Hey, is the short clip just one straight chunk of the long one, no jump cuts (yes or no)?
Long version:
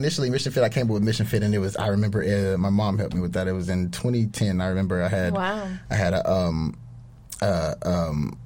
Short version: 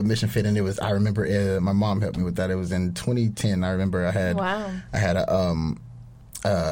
yes